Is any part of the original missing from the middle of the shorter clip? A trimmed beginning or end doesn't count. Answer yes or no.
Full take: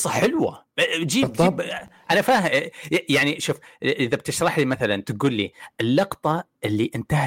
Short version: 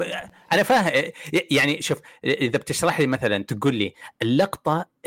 no